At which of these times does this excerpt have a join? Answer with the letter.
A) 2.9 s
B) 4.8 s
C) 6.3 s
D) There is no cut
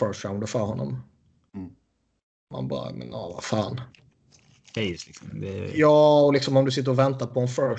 B